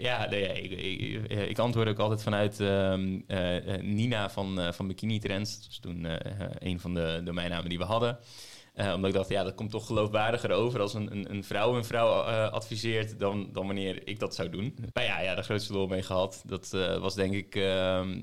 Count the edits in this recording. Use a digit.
1